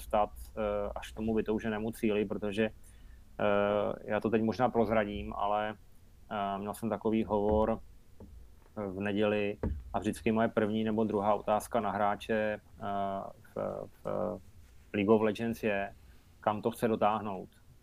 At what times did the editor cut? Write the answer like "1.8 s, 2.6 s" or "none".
none